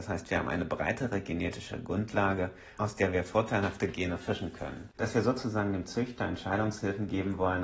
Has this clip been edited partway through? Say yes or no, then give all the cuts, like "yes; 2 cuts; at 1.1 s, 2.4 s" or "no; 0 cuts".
yes; 1 cut; at 4.9 s